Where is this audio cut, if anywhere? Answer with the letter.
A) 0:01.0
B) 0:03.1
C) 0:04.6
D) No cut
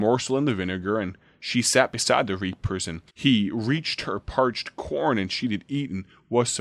B